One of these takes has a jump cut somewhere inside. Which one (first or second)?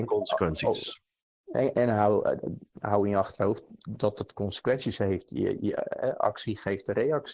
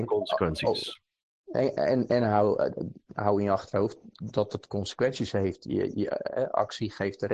first